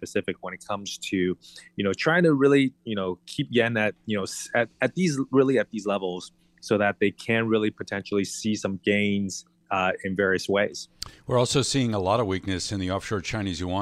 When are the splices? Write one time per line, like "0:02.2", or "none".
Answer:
none